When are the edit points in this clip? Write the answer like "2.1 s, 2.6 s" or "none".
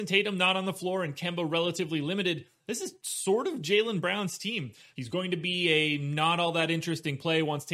4.9 s